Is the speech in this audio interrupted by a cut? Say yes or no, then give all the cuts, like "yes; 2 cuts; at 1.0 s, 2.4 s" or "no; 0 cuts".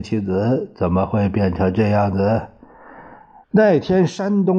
yes; 1 cut; at 3.4 s